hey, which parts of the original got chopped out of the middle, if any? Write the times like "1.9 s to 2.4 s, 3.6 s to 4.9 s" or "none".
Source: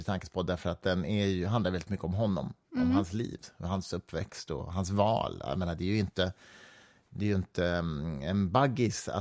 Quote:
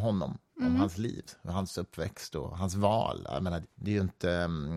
5.8 s to 7.0 s